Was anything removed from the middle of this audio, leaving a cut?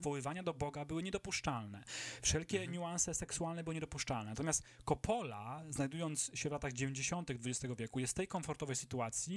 no; 0 cuts

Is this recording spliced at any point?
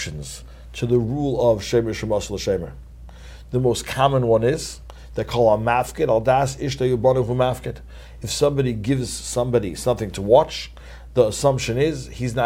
no; 0 cuts

